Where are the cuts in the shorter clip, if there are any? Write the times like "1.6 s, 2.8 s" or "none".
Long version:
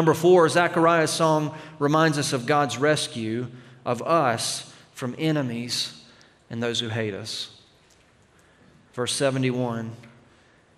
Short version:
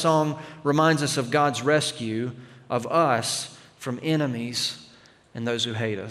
none